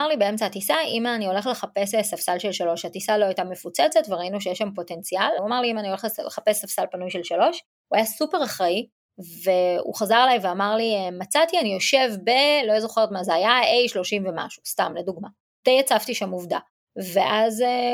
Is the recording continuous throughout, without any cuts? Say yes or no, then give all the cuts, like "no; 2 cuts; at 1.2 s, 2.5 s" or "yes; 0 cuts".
no; 2 cuts; at 5.4 s, 15.5 s